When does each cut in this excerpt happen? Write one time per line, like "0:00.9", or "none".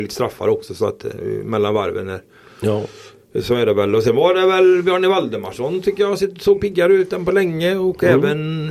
none